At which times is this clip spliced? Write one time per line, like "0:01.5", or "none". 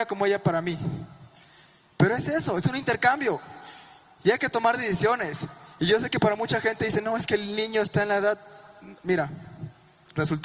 none